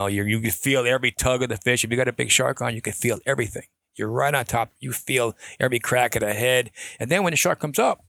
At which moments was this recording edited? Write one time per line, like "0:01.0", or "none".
none